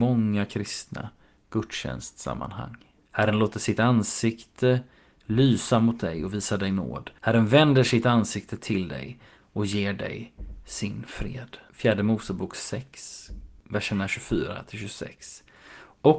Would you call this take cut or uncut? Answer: cut